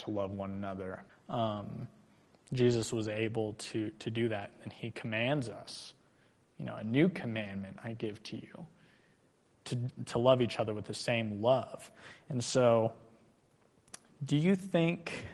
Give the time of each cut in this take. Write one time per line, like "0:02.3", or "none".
0:01.1